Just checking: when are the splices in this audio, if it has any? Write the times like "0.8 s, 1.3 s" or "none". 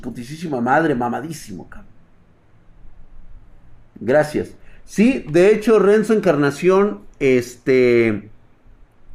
none